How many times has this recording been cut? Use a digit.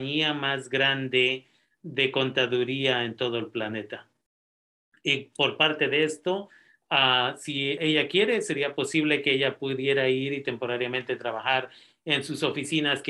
1